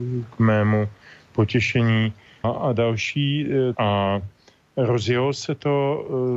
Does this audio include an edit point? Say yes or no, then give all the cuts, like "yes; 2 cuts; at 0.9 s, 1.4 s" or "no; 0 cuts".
yes; 2 cuts; at 2.4 s, 3.7 s